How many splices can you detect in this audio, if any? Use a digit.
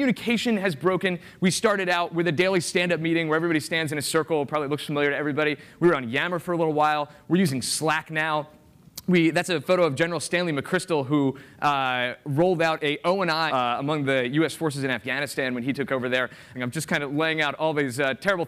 2